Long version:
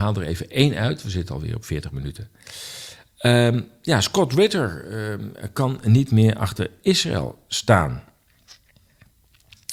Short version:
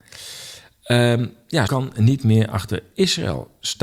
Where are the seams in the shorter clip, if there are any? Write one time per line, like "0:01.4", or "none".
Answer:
0:01.7